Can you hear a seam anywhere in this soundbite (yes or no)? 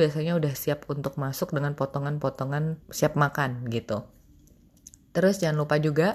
yes